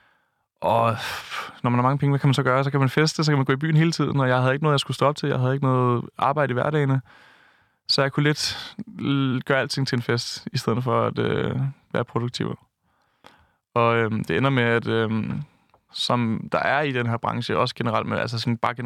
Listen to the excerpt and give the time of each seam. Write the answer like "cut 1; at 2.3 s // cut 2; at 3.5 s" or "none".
cut 1; at 15.9 s

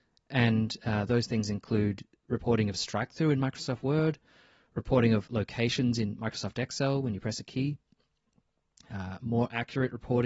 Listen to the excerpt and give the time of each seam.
none

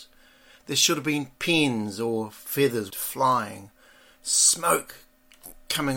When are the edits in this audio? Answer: cut 1; at 2.9 s

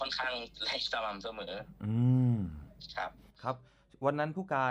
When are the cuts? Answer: none

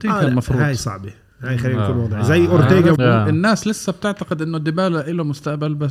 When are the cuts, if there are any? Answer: cut 1; at 3.0 s

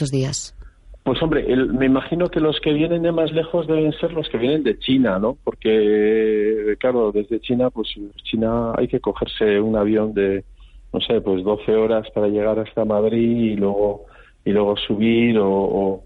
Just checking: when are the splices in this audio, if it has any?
cut 1; at 8.1 s

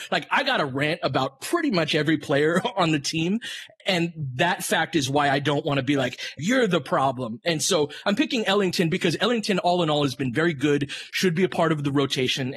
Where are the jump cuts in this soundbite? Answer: cut 1; at 6.4 s

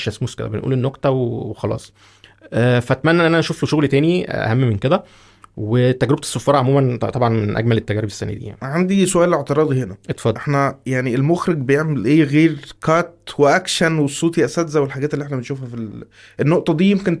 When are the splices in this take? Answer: none

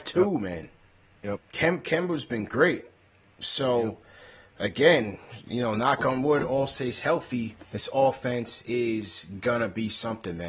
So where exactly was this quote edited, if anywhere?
cut 1; at 1.4 s // cut 2; at 7.6 s

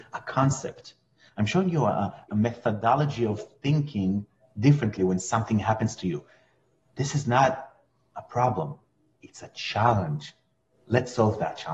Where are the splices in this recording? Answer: cut 1; at 2.3 s

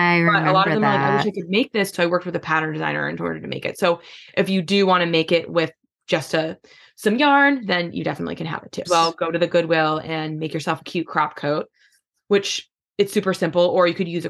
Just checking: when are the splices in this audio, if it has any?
cut 1; at 1.9 s // cut 2; at 8.8 s

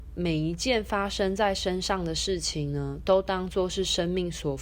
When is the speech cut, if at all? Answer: none

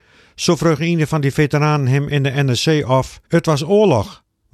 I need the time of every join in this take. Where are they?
cut 1; at 3.3 s

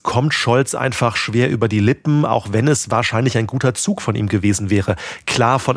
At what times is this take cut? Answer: none

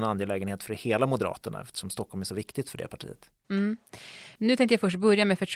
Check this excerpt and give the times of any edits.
cut 1; at 4.4 s

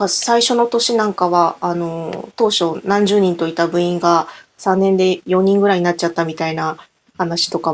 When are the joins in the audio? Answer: none

